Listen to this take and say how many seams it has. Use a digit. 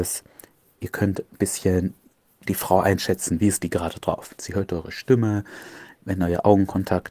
1